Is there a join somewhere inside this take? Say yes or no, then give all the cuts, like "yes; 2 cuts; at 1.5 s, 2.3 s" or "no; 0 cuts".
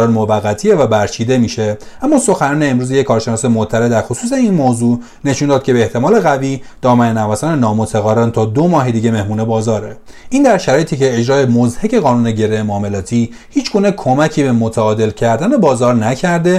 no; 0 cuts